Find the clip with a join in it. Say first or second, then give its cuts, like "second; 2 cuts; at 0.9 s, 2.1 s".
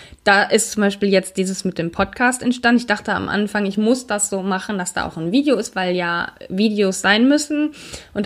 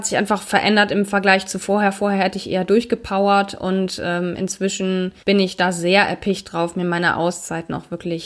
second; 1 cut; at 5.2 s